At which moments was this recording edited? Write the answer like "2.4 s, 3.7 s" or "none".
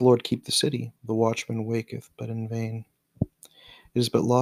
1.0 s

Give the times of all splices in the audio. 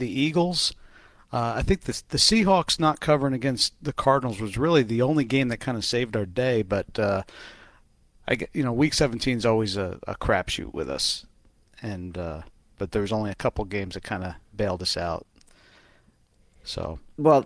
none

